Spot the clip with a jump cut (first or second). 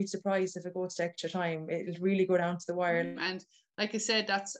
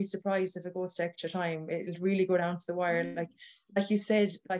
first